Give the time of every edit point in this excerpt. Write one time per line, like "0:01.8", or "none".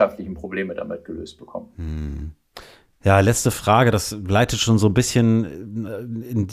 none